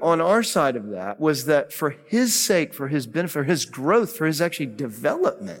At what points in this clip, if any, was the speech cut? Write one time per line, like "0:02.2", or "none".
none